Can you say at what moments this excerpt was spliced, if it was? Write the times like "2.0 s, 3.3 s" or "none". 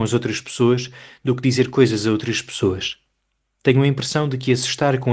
none